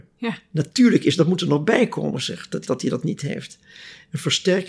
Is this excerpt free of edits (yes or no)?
no